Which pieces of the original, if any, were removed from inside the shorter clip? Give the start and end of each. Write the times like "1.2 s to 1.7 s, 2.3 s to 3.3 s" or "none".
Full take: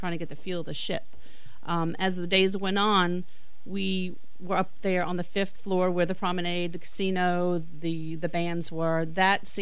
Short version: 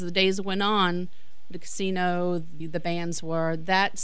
3.7 s to 6.7 s, 7.8 s to 8.1 s